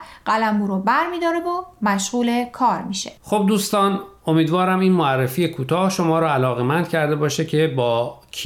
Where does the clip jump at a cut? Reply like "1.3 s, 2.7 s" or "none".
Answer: 3.2 s